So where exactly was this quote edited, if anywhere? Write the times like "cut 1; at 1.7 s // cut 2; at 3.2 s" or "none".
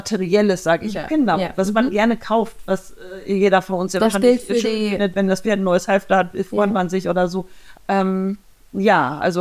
cut 1; at 0.9 s // cut 2; at 7.7 s